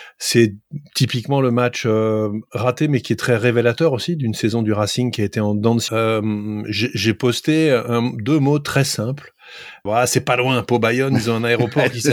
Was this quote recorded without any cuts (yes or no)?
no